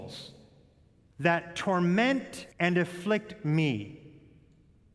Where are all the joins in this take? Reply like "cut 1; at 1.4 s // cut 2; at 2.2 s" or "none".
cut 1; at 2.5 s